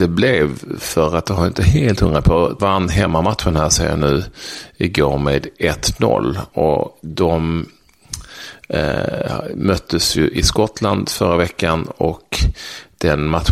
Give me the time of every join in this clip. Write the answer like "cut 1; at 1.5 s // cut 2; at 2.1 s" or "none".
cut 1; at 2.6 s